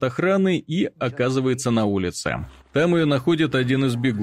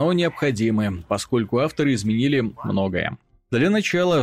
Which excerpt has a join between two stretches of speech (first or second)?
second